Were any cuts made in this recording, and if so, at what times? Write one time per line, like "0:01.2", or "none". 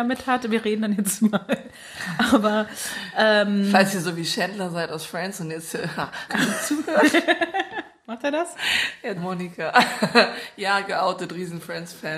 0:06.3
0:09.2